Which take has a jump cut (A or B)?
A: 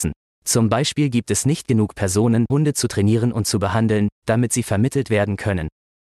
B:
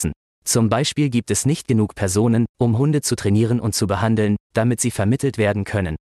A